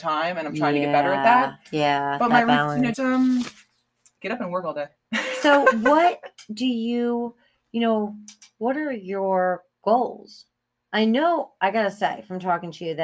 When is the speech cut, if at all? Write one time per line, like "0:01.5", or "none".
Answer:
0:02.9
0:04.2